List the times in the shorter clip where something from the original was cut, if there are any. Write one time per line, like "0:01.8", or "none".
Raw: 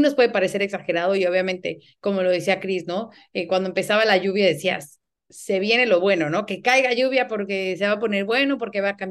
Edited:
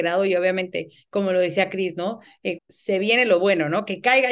0:02.6

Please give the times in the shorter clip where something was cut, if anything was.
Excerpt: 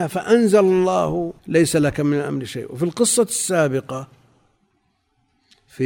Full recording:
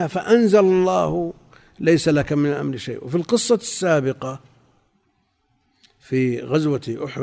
0:01.4

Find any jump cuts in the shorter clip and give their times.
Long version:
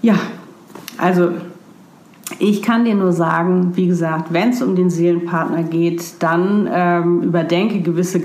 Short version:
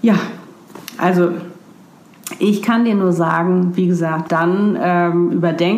0:04.3

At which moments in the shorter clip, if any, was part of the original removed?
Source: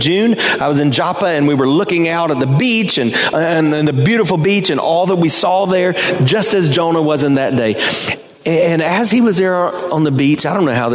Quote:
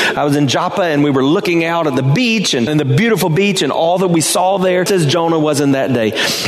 0:02.7
0:04.9

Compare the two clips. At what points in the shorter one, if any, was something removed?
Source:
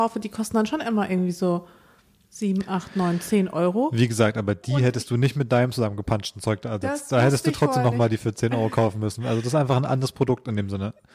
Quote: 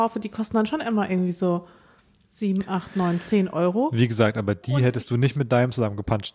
none

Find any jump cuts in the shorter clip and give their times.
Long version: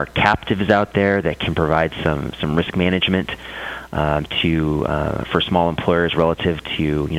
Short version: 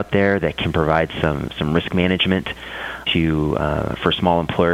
0:03.1

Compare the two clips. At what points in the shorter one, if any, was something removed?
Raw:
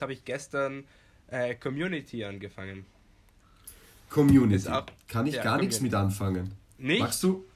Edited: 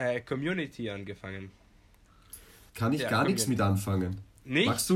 0:02.7

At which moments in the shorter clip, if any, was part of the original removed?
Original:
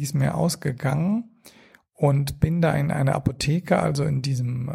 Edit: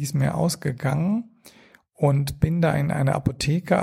none

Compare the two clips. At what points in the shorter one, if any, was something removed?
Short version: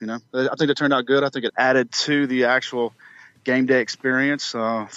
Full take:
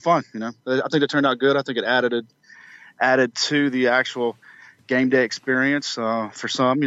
0:01.5

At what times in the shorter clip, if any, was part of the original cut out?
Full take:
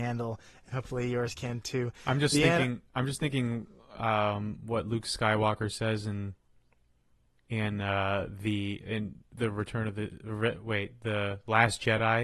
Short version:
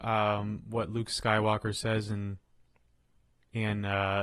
none

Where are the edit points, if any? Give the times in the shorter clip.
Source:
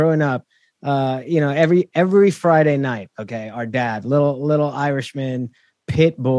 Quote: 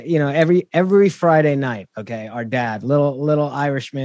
none

